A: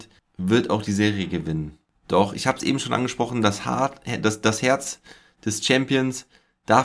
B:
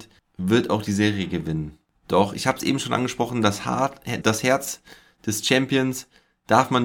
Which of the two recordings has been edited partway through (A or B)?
B